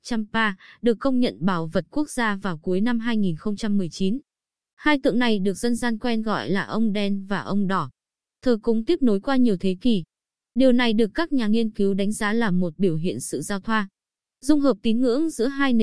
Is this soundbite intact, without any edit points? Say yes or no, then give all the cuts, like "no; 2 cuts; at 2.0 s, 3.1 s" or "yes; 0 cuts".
yes; 0 cuts